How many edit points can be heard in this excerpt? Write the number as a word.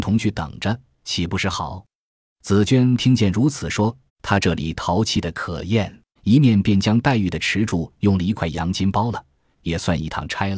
three